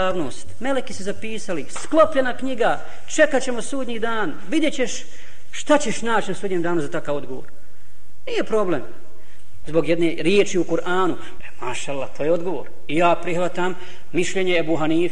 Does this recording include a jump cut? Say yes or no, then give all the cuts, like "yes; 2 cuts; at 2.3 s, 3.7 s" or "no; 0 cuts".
yes; 2 cuts; at 9.6 s, 11.4 s